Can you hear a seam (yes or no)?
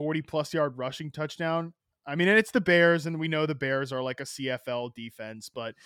no